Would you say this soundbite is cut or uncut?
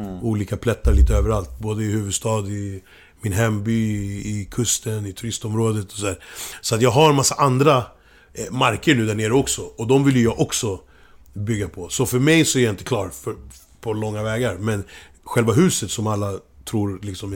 uncut